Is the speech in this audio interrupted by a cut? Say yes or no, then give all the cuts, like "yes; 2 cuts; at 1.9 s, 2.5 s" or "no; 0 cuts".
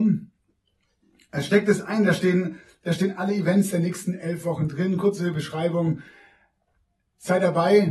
no; 0 cuts